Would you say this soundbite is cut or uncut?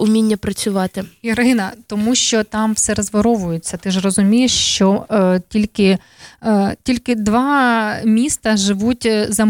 uncut